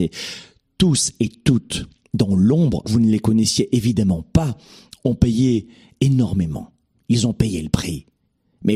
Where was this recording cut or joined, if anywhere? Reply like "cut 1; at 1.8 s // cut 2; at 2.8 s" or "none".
cut 1; at 2.8 s